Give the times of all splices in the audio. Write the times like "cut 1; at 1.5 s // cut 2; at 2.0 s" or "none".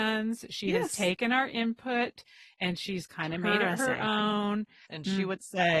cut 1; at 4.9 s